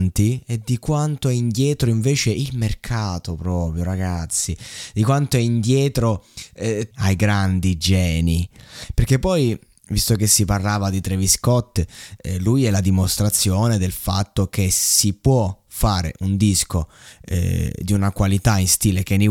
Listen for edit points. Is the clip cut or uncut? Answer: cut